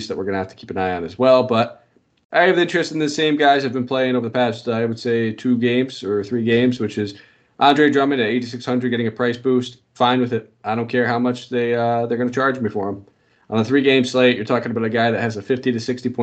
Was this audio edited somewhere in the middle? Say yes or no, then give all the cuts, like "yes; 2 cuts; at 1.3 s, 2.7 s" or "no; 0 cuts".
no; 0 cuts